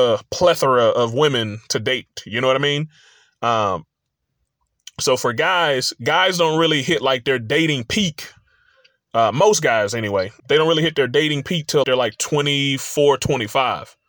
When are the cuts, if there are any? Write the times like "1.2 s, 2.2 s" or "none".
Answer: 10.4 s, 11.8 s